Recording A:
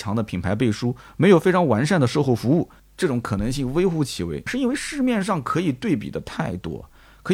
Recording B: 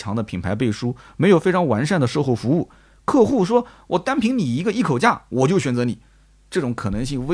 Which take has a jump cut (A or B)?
A